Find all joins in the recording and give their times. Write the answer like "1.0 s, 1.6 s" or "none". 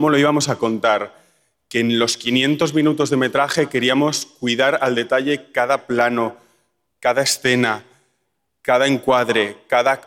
none